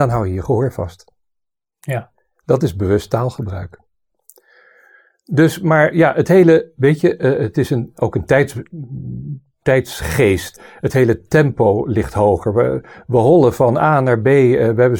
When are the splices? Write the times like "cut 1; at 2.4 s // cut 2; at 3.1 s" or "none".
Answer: none